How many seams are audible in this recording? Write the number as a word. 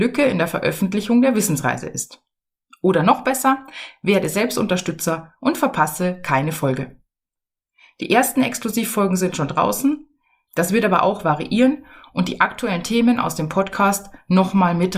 one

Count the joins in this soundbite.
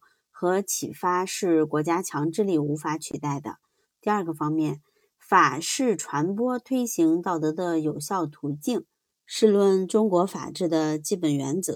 two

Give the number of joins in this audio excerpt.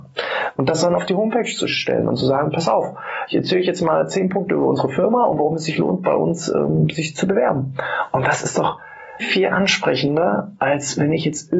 one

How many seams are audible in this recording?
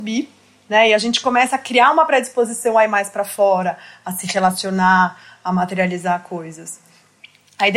zero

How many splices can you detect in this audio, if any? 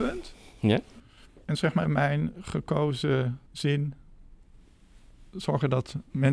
two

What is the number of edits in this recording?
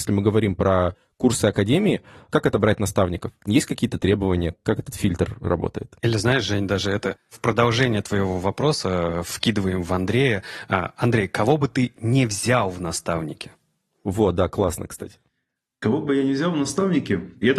zero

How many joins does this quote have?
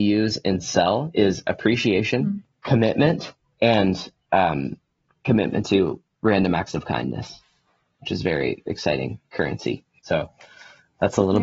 one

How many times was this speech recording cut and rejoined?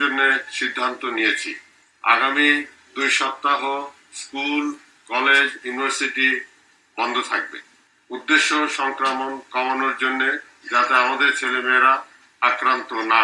zero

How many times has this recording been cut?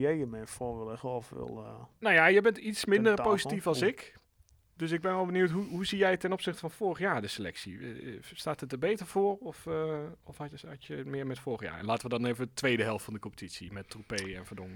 zero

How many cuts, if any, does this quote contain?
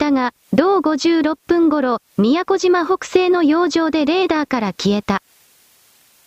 one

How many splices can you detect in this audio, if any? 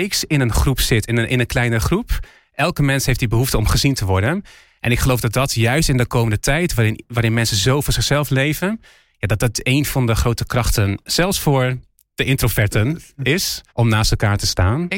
one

